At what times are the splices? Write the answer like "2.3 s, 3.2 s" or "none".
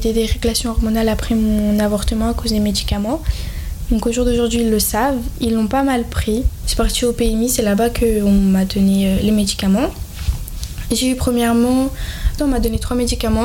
6.6 s, 12.4 s